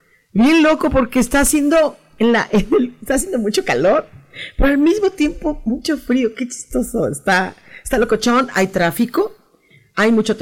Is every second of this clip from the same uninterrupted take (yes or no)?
yes